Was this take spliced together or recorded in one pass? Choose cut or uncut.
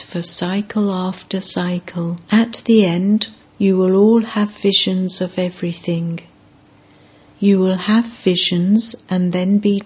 cut